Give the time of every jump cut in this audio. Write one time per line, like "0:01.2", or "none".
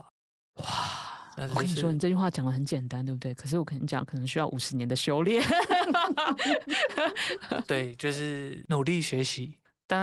none